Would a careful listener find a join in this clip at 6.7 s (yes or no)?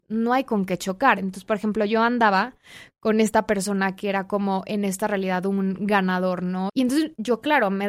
yes